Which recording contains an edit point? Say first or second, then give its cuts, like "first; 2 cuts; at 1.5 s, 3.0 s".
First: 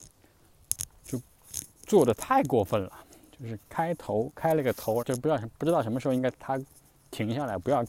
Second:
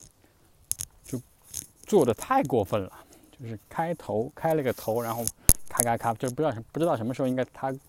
first; 1 cut; at 5.0 s